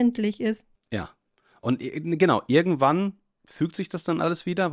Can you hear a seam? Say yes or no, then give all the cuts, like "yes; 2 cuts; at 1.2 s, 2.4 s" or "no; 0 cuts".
no; 0 cuts